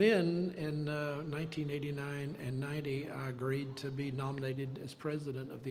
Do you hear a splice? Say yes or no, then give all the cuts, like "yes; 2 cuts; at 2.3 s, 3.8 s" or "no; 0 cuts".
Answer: no; 0 cuts